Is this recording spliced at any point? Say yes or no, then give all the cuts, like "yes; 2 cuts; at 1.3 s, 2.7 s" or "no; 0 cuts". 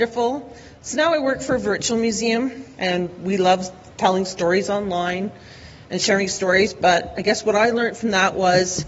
yes; 1 cut; at 2.8 s